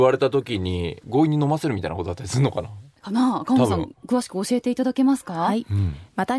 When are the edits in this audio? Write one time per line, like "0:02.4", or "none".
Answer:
0:01.0

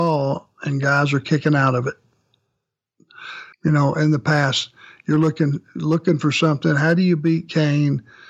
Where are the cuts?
0:03.5

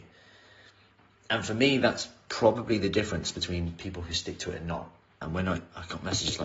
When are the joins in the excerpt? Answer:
0:05.2

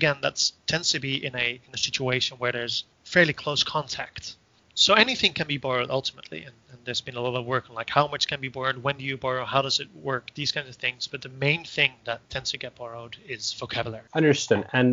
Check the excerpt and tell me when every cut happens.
0:11.1

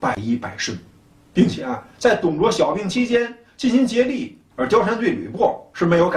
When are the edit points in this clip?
0:04.5

